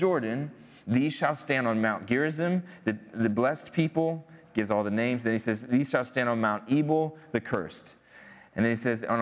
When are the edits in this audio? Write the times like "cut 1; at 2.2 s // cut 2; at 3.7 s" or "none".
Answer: none